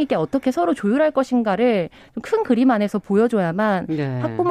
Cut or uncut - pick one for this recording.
uncut